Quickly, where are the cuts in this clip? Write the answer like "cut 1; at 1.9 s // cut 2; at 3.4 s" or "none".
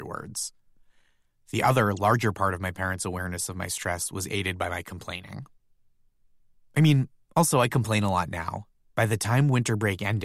cut 1; at 6.6 s // cut 2; at 8.8 s